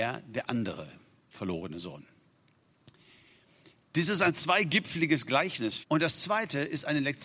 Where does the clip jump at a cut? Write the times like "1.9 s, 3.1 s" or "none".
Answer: 5.8 s